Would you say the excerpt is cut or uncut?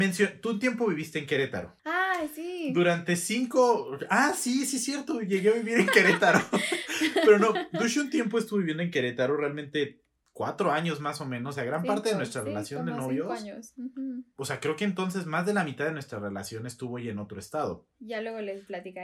cut